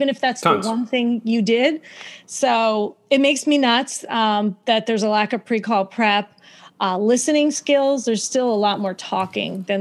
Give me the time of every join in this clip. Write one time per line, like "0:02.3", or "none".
none